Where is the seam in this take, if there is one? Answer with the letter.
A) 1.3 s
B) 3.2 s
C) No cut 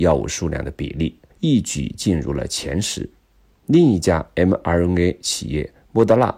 A